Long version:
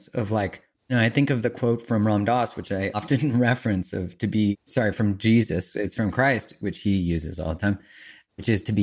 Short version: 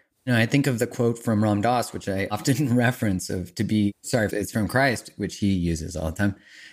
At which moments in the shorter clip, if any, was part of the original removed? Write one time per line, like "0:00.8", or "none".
0:04.3